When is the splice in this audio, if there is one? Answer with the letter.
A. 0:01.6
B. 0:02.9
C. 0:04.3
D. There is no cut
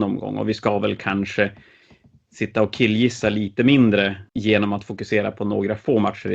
C